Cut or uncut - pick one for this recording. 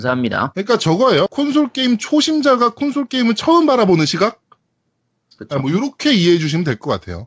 cut